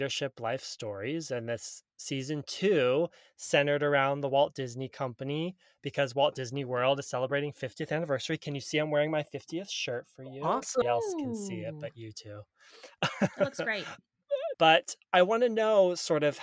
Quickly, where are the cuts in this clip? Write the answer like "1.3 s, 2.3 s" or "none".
10.8 s, 14.5 s